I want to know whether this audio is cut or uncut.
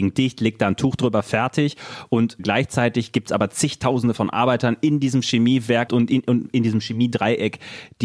cut